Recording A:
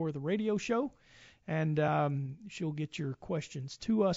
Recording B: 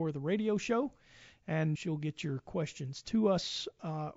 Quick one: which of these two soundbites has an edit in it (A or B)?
B